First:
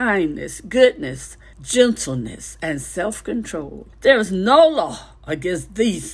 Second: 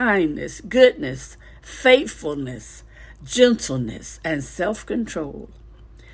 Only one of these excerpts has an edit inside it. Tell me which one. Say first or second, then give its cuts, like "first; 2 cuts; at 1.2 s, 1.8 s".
first; 2 cuts; at 1.5 s, 3.9 s